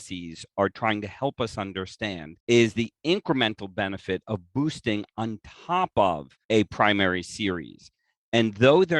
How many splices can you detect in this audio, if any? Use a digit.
2